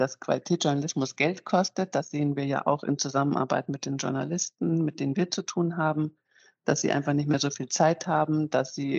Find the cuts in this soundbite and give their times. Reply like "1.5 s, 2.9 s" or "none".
none